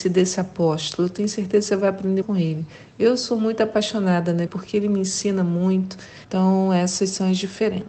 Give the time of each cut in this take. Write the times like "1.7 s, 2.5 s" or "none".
2.2 s, 4.5 s, 6.2 s

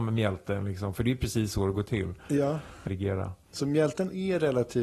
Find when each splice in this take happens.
2.9 s

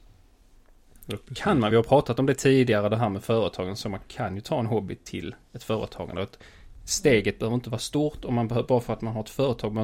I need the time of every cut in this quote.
none

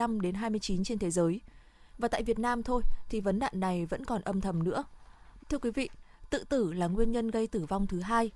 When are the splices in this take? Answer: 1.9 s, 5.4 s

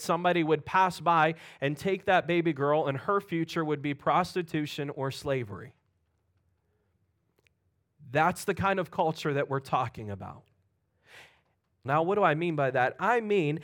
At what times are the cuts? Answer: 11.8 s

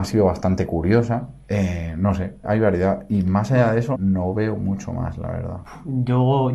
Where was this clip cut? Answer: 2.4 s, 3.9 s

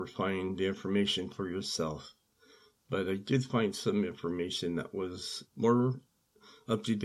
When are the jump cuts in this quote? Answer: 5.4 s

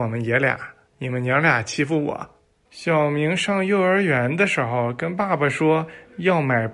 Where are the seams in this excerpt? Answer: 0.9 s, 2.6 s

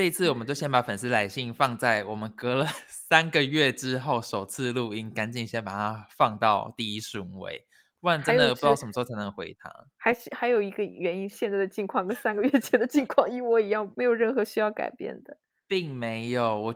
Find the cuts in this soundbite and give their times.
11.3 s, 13.9 s

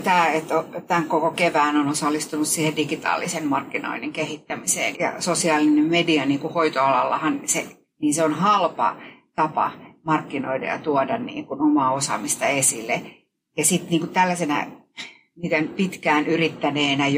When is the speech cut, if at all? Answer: 4.9 s, 7.8 s

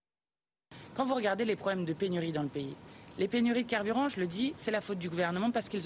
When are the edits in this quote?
none

